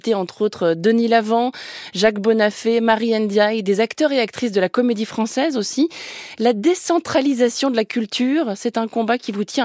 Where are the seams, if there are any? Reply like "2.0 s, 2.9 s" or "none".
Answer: none